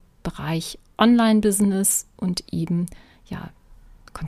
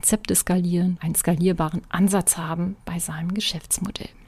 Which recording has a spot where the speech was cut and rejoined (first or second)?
second